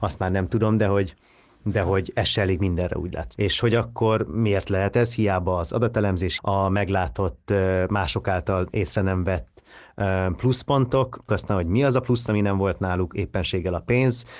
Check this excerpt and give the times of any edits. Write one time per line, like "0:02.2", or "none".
0:03.3
0:06.4
0:11.3